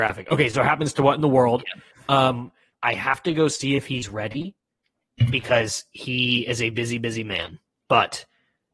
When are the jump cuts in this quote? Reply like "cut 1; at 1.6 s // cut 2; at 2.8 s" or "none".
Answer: cut 1; at 2.7 s